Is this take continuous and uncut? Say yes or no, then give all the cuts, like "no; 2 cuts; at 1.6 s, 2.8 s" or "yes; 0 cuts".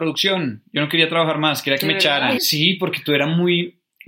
no; 1 cut; at 2.4 s